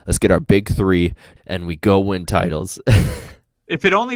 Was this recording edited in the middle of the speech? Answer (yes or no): yes